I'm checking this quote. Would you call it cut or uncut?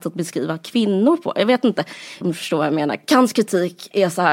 cut